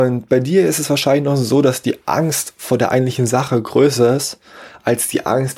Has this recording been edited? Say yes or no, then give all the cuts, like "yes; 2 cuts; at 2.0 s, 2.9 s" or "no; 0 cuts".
no; 0 cuts